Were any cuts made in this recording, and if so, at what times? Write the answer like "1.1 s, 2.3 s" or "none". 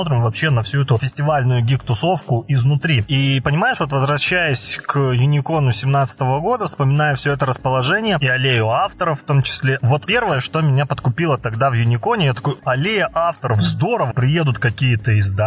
9.8 s, 12.6 s, 14.1 s